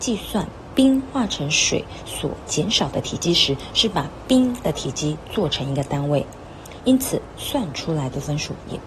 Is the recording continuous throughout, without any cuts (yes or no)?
no